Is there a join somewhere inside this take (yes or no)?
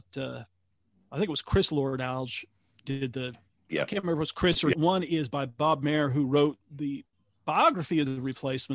yes